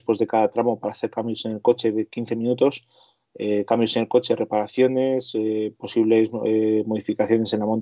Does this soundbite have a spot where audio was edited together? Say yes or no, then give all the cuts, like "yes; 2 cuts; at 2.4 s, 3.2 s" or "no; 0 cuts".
no; 0 cuts